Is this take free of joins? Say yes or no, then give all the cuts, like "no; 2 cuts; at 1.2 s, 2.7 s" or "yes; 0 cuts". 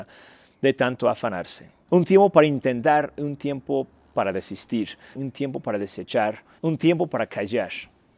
no; 3 cuts; at 1.9 s, 5.1 s, 6.6 s